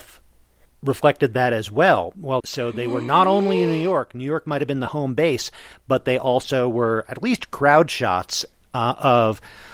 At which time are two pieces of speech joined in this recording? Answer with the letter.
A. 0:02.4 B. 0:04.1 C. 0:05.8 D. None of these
A